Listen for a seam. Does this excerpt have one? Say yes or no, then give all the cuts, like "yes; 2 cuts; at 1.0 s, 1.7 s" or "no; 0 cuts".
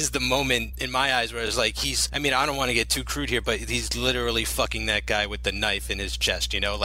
no; 0 cuts